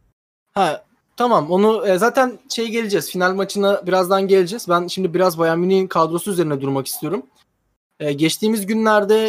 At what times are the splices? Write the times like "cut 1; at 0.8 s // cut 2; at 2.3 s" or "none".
none